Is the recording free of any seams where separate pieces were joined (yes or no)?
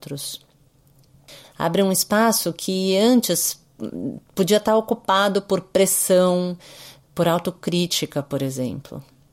no